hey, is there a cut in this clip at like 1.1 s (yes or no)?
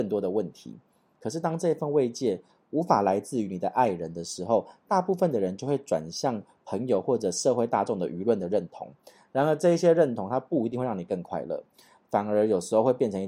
yes